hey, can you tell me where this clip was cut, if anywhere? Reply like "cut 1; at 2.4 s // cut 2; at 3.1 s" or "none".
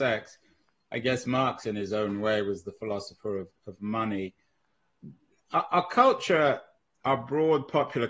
none

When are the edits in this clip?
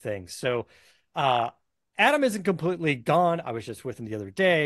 cut 1; at 3.4 s

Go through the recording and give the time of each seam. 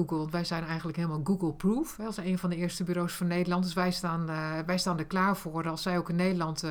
none

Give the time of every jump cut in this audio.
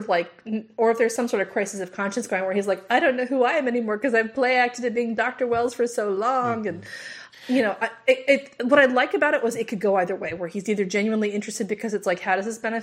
none

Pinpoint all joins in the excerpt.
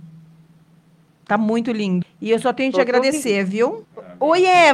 cut 1; at 2.0 s // cut 2; at 3.8 s

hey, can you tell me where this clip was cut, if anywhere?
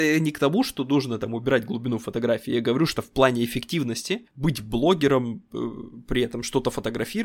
cut 1; at 2.9 s

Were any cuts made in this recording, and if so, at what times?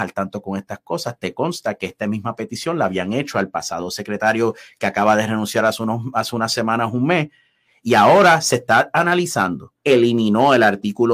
cut 1; at 9.8 s

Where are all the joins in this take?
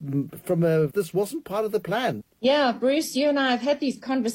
cut 1; at 0.9 s // cut 2; at 2.2 s

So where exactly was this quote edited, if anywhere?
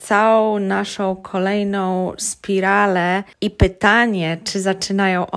cut 1; at 3.3 s

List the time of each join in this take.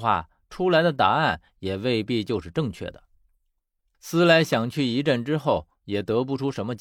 none

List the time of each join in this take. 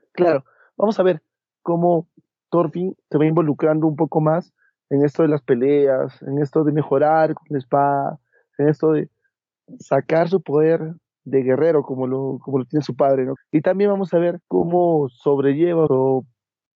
cut 1; at 13.4 s // cut 2; at 14.4 s // cut 3; at 15.9 s

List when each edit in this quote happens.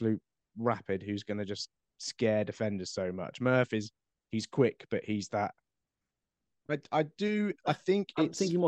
cut 1; at 6.5 s

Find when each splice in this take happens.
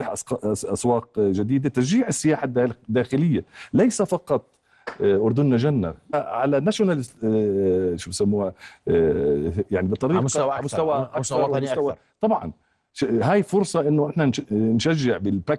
cut 1; at 6.1 s

